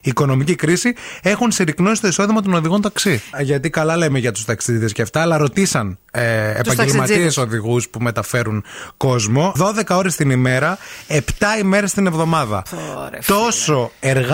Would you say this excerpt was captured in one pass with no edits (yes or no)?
no